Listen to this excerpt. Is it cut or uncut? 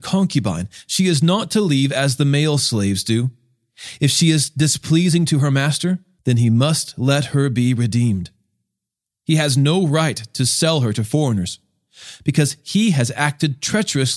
cut